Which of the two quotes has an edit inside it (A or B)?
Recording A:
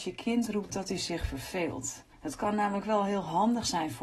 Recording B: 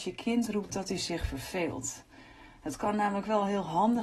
A